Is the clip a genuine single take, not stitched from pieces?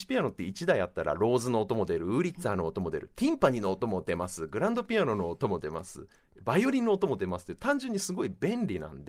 yes; 0 cuts

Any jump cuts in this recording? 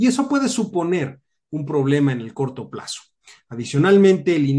no; 0 cuts

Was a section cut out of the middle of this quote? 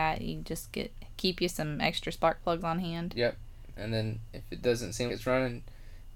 yes; 2 cuts; at 3.7 s, 5.1 s

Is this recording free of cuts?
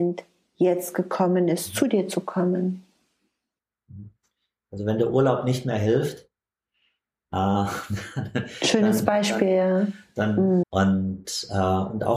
no; 1 cut; at 10.6 s

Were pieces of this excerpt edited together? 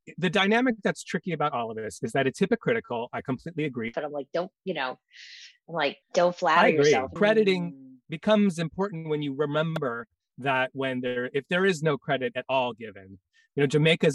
yes; 3 cuts; at 3.9 s, 6.0 s, 7.2 s

